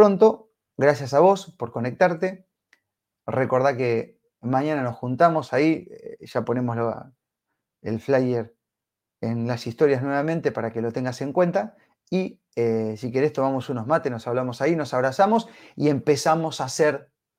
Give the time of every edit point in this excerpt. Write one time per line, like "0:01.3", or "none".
none

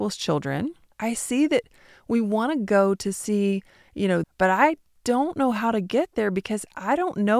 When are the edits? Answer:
0:00.9
0:04.2

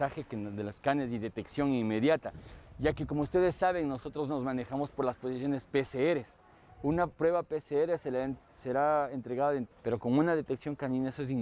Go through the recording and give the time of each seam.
0:07.1
0:09.7

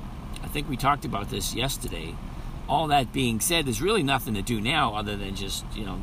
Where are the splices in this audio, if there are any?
0:02.6

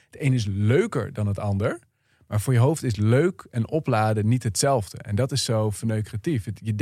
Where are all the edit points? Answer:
none

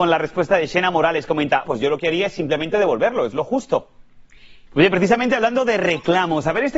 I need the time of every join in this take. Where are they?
0:01.6
0:04.7

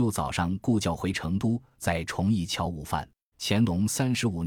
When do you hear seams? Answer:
0:03.3

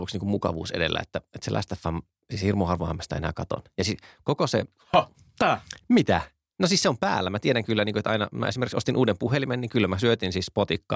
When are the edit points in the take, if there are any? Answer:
none

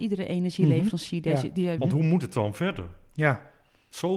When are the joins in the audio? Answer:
0:01.8

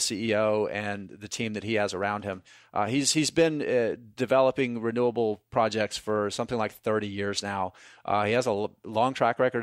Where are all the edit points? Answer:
none

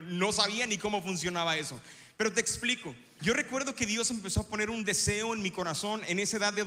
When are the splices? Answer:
0:03.2

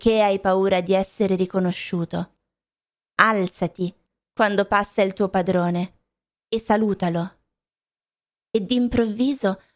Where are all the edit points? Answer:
none

